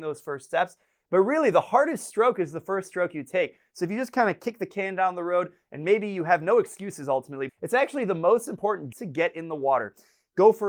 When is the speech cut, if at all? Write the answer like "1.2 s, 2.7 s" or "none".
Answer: 7.5 s, 8.9 s